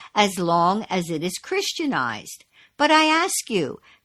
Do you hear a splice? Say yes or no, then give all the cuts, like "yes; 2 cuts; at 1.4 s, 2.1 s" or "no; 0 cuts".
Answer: no; 0 cuts